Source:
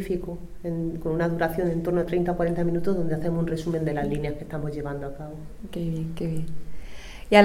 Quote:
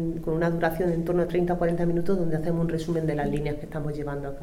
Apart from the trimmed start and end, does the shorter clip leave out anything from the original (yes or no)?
no